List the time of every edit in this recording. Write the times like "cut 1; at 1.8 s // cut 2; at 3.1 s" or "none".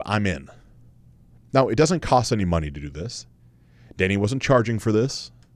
none